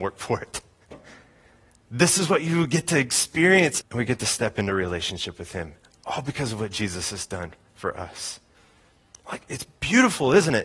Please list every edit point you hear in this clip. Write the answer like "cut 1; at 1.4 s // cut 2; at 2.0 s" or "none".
cut 1; at 3.8 s